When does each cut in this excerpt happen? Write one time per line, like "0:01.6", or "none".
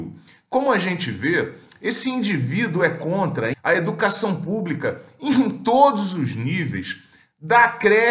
0:03.5